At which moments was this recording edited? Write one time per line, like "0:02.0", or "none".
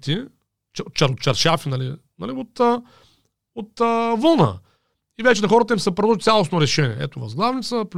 none